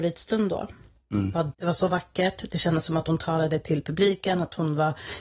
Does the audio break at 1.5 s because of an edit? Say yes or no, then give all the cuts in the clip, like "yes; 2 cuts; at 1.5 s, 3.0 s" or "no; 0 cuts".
yes; 1 cut; at 1.5 s